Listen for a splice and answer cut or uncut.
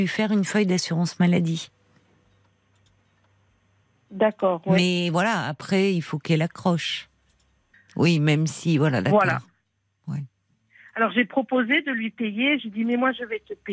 cut